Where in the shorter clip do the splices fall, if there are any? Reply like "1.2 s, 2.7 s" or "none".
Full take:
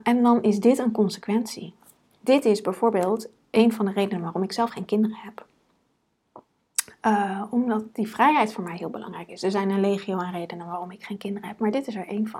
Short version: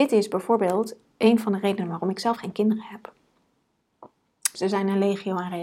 4.5 s